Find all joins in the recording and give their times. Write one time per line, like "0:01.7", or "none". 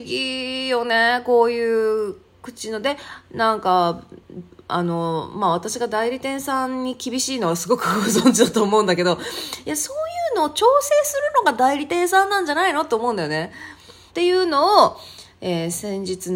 0:14.1